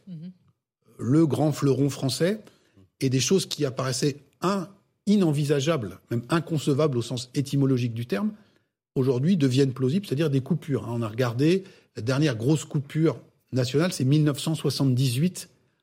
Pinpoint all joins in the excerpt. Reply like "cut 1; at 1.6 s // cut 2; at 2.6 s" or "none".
none